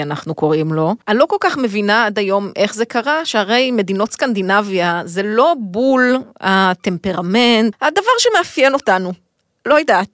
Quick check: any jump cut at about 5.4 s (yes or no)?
no